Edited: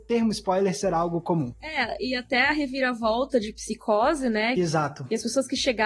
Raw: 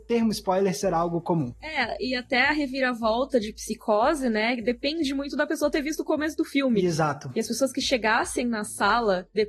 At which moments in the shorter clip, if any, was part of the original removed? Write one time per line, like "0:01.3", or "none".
0:04.6